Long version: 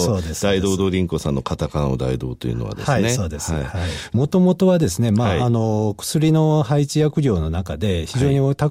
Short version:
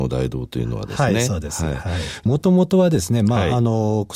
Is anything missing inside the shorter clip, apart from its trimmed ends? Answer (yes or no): no